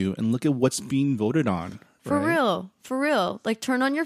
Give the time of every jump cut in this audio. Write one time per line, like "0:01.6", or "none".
none